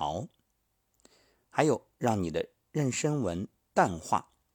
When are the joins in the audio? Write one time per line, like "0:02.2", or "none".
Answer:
none